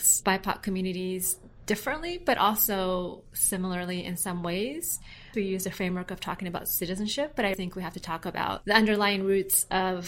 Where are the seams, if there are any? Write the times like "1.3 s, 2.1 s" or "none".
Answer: 5.3 s, 7.5 s